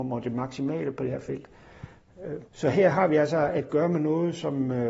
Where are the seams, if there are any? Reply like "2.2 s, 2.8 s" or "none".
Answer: 2.4 s